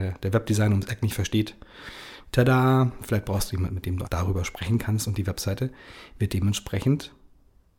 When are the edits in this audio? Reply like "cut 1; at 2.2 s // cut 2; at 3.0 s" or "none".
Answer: cut 1; at 4.0 s